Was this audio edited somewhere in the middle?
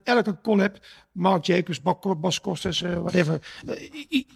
no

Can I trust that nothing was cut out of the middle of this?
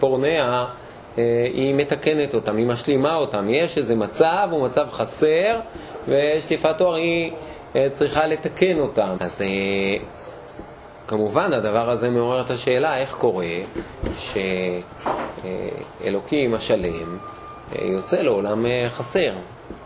no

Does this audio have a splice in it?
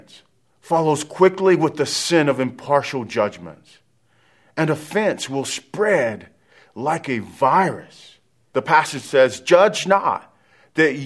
yes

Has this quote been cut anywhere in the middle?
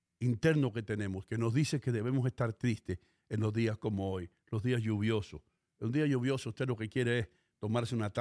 no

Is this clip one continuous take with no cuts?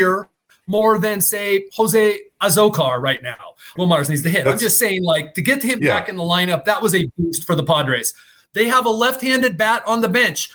no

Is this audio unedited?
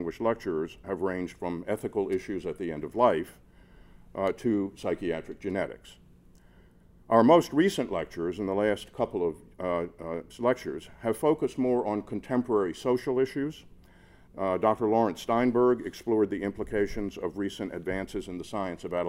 yes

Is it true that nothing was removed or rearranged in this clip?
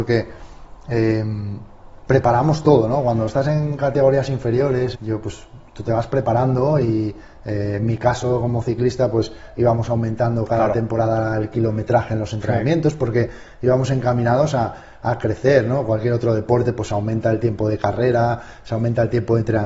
no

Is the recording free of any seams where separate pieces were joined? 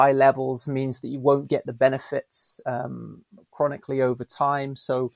yes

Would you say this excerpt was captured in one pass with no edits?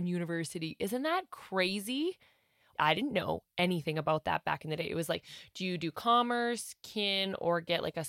no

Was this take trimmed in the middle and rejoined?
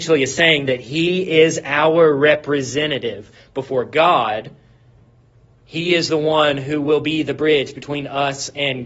no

